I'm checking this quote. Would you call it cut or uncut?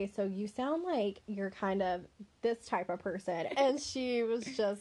cut